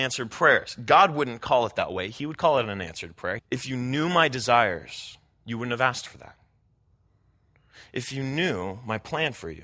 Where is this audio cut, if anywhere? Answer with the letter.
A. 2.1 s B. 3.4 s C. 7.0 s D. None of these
B